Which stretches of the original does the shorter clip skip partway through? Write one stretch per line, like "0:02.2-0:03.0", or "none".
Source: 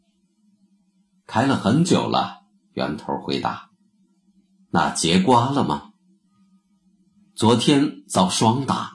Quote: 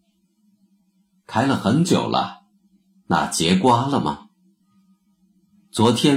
0:02.6-0:04.2